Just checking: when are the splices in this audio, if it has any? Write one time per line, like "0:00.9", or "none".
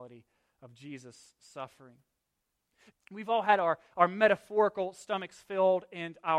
0:02.9